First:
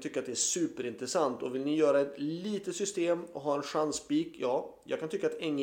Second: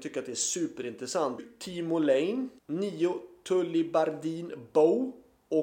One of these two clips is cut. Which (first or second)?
second